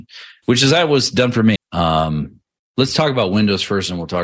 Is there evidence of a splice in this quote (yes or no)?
yes